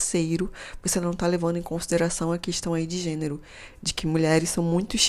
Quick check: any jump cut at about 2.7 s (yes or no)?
no